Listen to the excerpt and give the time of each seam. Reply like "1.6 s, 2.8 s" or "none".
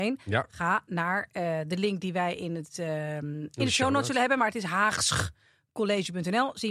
none